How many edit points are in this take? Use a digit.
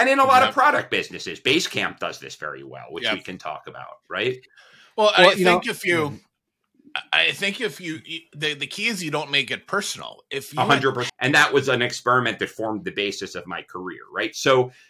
1